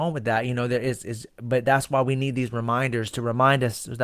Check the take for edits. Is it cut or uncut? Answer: uncut